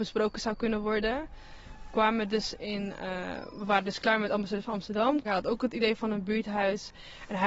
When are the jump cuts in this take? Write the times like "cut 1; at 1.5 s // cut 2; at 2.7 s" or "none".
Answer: cut 1; at 5.2 s

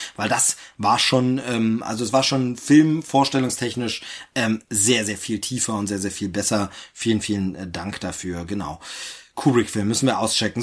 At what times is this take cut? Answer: none

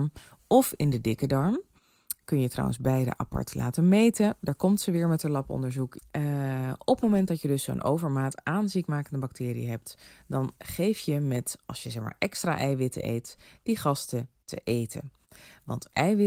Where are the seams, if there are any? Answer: cut 1; at 6.0 s

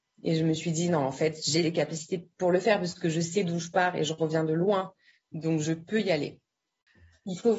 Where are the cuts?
none

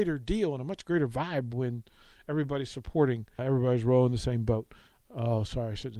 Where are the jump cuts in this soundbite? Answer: cut 1; at 3.4 s

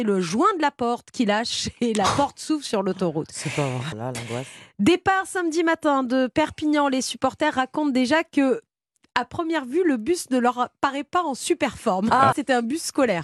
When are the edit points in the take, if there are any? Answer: cut 1; at 3.9 s // cut 2; at 12.3 s

